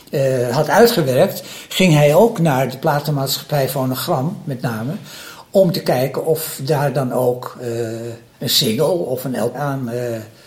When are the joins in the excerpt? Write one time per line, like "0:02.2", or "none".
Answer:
0:08.3
0:09.5